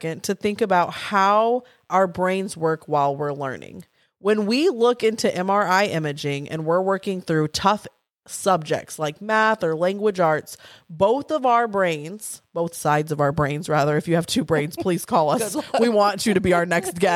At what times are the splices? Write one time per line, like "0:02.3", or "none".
none